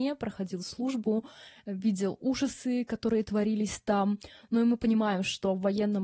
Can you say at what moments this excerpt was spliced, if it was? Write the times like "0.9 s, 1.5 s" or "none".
none